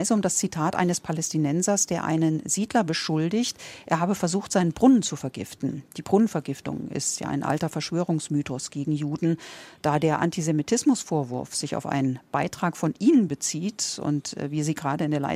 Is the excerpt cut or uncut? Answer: uncut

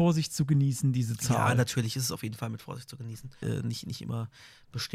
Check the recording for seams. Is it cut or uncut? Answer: cut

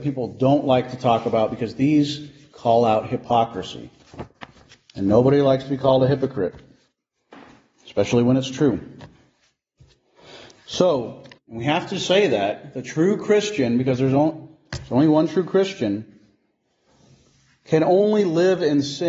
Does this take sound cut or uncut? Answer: cut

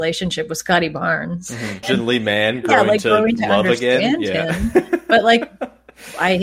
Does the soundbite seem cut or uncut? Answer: cut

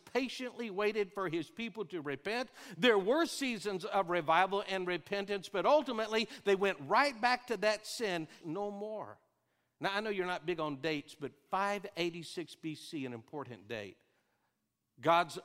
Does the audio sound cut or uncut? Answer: cut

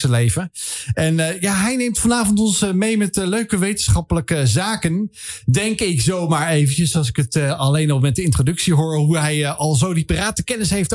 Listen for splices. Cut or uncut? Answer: uncut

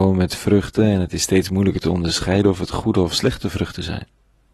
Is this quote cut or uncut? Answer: uncut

